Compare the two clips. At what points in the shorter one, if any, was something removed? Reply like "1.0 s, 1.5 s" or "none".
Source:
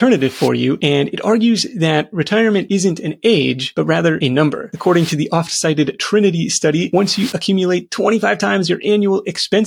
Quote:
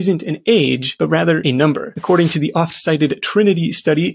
none